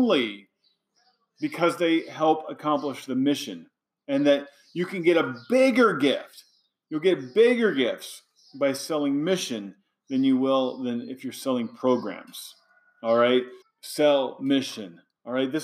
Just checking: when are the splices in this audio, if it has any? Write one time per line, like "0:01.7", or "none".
0:13.6